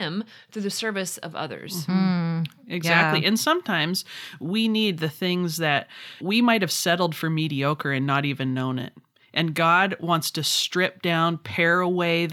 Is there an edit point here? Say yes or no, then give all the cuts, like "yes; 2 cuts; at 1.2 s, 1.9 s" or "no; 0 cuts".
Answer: yes; 1 cut; at 6.2 s